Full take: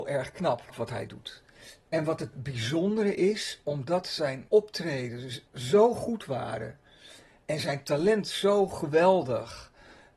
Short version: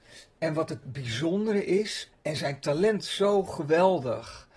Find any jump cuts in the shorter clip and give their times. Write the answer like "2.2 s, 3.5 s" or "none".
2.1 s